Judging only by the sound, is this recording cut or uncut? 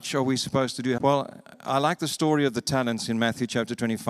cut